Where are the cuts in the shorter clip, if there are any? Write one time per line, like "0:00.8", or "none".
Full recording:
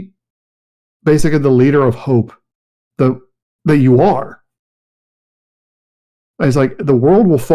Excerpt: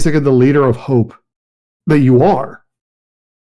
0:01.7